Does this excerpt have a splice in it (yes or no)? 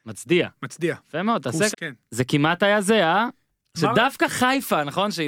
yes